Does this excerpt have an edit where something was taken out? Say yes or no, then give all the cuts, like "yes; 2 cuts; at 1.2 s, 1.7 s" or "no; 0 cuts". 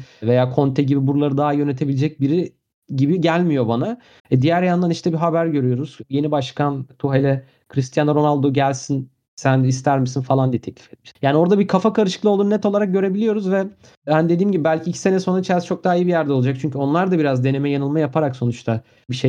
yes; 2 cuts; at 4.2 s, 11.1 s